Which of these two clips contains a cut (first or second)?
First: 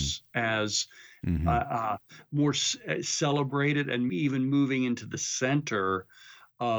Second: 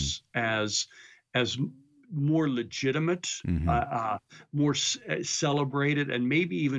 first